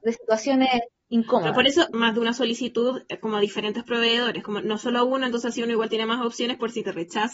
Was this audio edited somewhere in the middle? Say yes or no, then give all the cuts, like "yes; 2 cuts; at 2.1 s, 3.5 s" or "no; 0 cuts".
yes; 1 cut; at 1.9 s